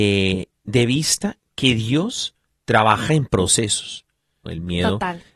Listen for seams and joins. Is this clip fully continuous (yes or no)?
no